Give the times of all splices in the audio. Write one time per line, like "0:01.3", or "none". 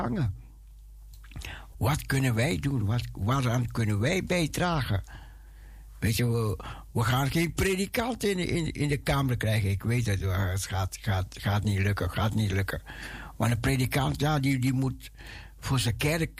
0:01.7